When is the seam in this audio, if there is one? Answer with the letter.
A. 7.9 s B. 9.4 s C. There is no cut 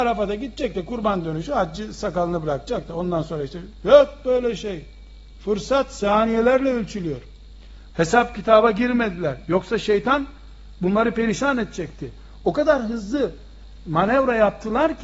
A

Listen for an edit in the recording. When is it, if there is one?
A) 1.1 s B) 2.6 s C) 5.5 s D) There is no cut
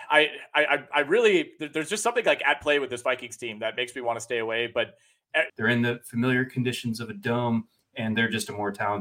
C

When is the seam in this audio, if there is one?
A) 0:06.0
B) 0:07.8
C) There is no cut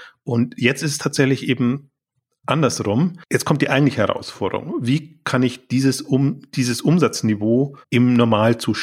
B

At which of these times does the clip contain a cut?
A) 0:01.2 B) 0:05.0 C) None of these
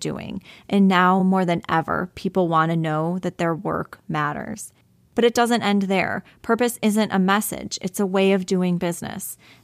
C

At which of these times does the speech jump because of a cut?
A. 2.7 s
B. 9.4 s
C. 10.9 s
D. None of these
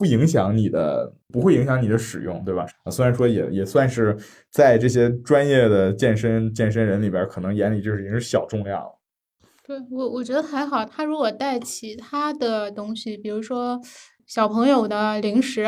A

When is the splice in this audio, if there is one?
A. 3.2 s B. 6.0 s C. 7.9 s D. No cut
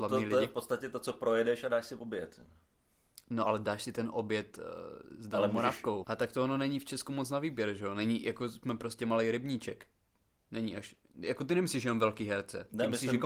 B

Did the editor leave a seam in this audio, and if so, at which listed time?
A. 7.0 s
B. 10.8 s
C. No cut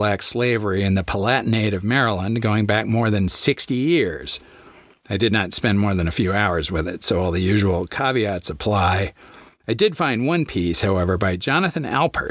C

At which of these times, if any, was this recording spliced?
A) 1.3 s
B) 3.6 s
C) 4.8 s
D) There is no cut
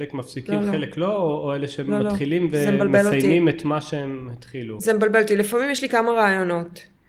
D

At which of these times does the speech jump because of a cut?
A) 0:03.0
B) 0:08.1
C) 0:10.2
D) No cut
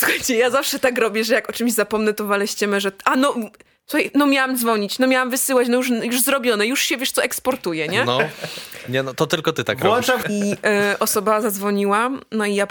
C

